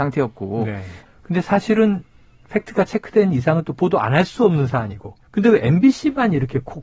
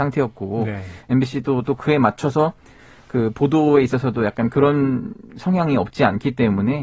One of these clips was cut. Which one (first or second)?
first